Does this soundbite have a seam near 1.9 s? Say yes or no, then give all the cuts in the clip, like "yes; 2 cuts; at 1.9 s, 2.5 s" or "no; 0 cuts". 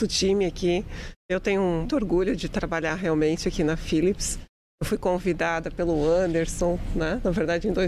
yes; 1 cut; at 1.9 s